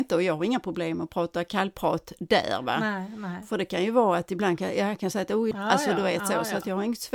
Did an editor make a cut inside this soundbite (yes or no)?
yes